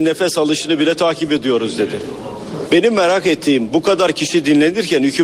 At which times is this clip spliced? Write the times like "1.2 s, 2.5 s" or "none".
2.7 s

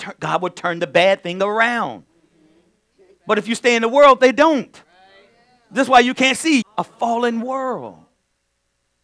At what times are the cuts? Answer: 6.6 s

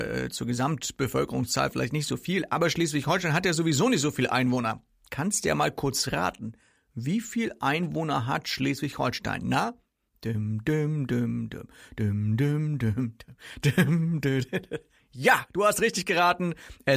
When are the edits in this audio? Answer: none

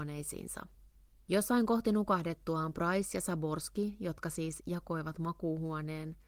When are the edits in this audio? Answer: none

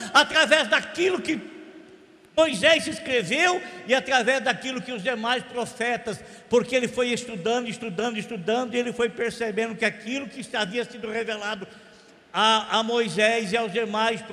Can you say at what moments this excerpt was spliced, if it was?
none

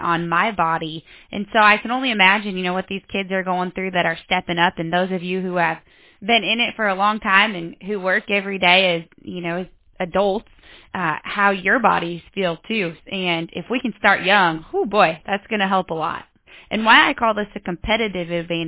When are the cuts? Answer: 13.0 s

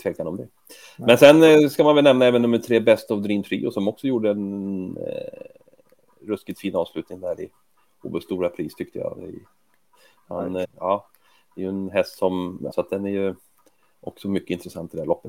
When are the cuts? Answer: 10.6 s, 12.7 s

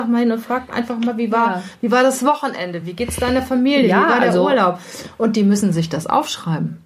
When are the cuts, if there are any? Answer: none

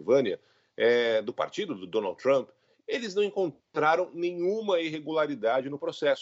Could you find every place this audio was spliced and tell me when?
none

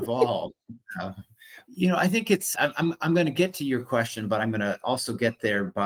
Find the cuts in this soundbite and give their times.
2.5 s

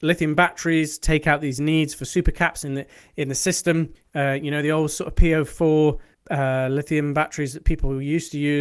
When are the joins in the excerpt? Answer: none

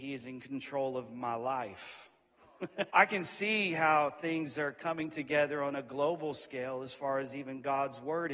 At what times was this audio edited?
2.9 s

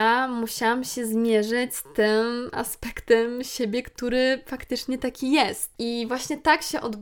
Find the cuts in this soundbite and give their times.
5.7 s

